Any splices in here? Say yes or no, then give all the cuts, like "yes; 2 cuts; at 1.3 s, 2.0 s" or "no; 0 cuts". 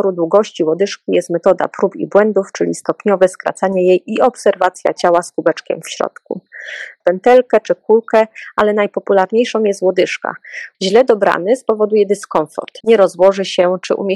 yes; 3 cuts; at 7.0 s, 10.7 s, 12.8 s